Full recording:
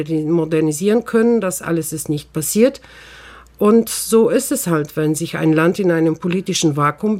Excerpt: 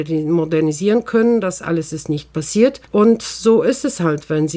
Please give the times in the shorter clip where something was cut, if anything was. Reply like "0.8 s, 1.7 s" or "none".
2.8 s